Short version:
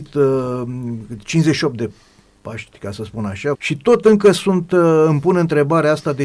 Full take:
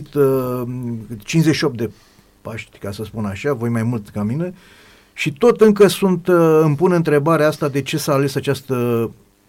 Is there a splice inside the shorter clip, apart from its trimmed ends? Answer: yes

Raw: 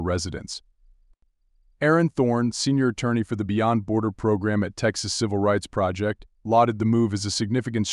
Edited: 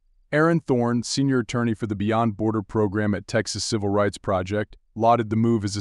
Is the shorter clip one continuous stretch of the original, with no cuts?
yes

